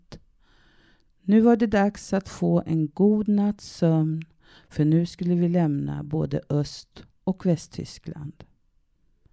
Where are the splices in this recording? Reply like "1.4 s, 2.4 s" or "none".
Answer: 1.1 s, 7.1 s